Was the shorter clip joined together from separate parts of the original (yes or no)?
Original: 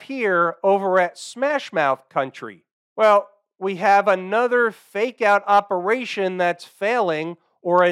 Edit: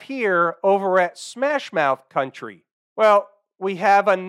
no